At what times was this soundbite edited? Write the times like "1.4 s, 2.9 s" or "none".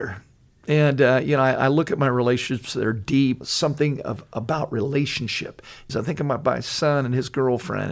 3.4 s, 5.9 s